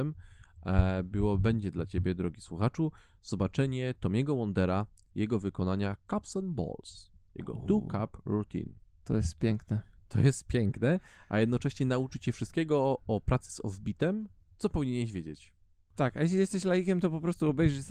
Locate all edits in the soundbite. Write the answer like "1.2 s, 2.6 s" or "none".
none